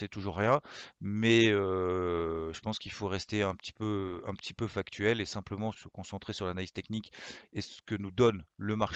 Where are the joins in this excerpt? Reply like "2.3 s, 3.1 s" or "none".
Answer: 5.7 s

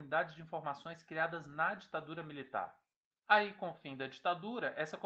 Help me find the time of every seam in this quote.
3.1 s

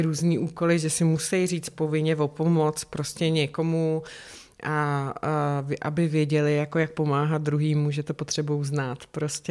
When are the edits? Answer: none

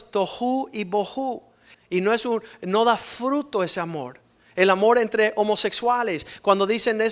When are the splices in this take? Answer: 1.7 s

